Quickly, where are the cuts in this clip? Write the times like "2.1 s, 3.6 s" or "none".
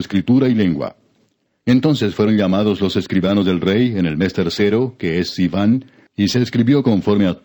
1.6 s, 6.1 s